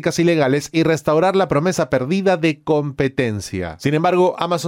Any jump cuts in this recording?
no; 0 cuts

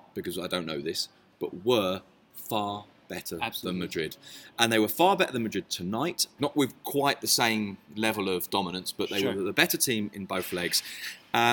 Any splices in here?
yes; 1 cut; at 6.4 s

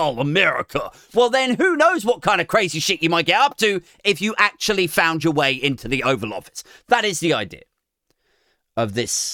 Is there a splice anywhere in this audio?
no; 0 cuts

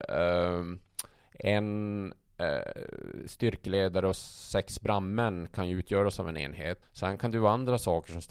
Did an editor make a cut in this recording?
yes; 1 cut; at 6.8 s

